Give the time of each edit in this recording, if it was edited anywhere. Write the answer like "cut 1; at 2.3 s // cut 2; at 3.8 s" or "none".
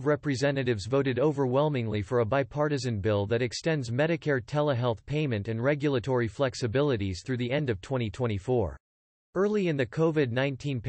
cut 1; at 9.2 s